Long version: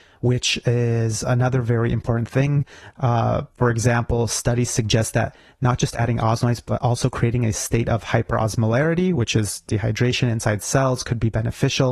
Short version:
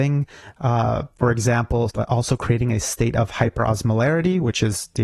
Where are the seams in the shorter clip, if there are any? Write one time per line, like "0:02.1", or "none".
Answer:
0:01.9